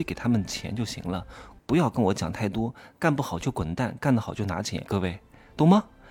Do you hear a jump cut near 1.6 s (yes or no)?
yes